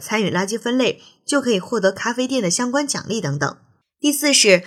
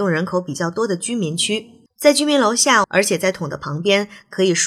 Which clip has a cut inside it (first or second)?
second